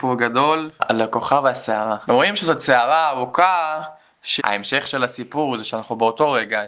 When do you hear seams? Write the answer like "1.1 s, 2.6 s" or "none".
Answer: 2.1 s, 4.4 s